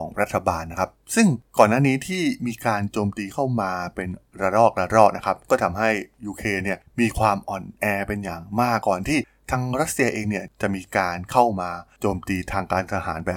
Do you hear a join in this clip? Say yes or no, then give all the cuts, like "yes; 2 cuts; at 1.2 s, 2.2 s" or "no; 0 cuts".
yes; 2 cuts; at 1.5 s, 8.8 s